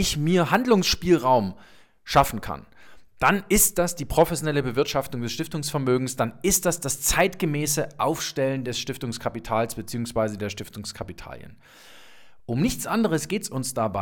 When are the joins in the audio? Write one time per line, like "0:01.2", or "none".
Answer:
none